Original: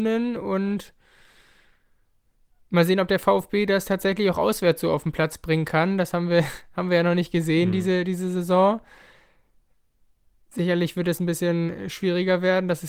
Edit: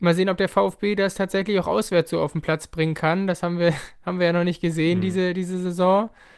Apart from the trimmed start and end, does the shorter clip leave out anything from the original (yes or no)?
no